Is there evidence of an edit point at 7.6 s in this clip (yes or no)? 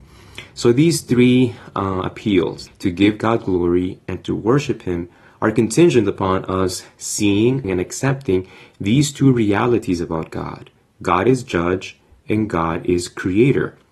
yes